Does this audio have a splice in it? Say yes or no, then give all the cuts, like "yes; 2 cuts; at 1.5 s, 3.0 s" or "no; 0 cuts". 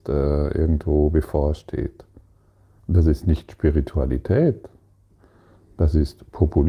yes; 1 cut; at 2.8 s